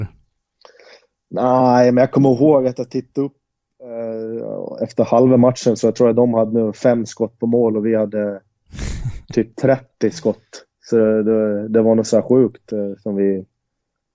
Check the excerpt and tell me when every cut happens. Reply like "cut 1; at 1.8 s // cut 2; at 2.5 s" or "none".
none